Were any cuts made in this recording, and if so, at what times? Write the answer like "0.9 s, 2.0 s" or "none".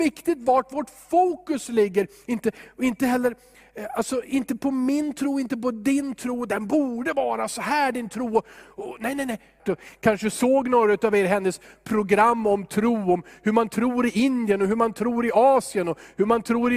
9.6 s